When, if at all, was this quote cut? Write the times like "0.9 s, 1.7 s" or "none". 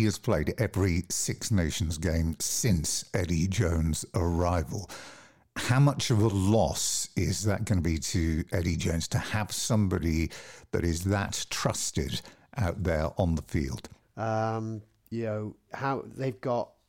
14.0 s, 15.7 s